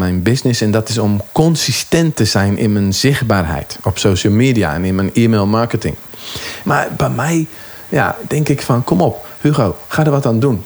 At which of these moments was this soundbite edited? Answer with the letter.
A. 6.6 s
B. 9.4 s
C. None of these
A